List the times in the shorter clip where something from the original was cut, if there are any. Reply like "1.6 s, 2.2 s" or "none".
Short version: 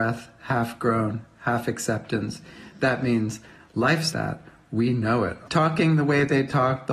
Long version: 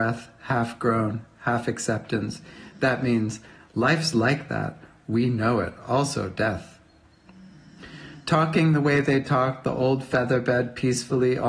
4.1 s, 5.5 s